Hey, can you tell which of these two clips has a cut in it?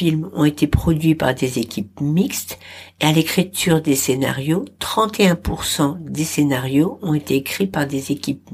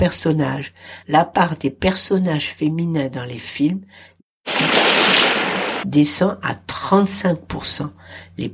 second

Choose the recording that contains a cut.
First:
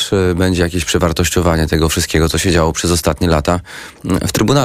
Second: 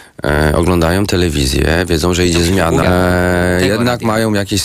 second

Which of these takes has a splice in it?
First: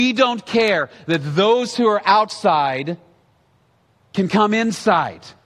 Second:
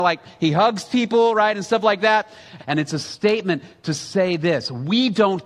second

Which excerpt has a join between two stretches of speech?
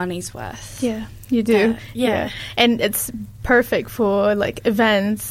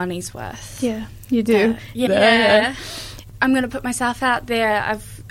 second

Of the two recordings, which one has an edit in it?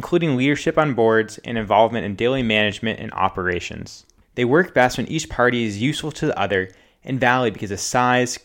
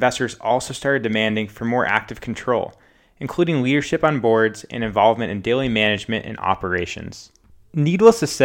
first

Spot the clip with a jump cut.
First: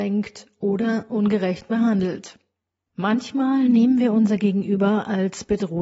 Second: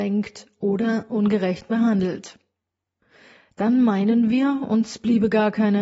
first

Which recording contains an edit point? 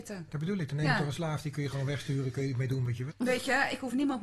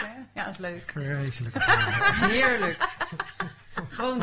first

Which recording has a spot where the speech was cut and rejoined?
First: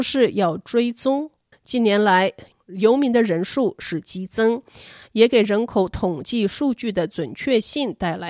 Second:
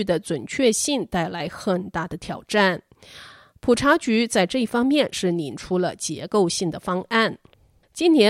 first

